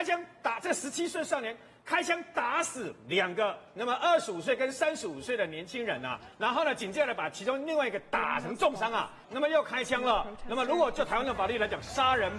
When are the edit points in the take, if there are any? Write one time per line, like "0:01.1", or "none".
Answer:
0:09.2